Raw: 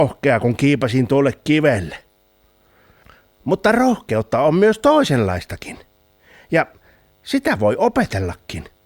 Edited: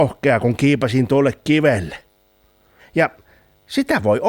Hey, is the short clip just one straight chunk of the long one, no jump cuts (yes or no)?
no